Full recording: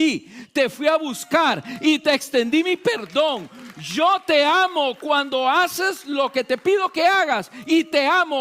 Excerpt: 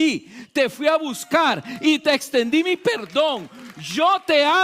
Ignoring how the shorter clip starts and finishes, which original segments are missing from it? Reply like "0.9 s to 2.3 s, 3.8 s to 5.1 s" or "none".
none